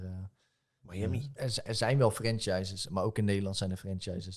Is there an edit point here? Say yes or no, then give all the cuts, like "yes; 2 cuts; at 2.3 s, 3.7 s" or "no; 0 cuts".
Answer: yes; 1 cut; at 1.4 s